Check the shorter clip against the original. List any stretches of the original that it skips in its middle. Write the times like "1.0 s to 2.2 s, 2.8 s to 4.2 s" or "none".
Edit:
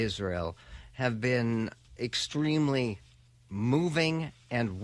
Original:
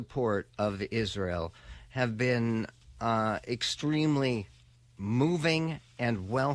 2.9 s to 3.4 s